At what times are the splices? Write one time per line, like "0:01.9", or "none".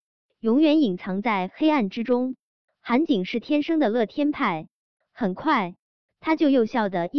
none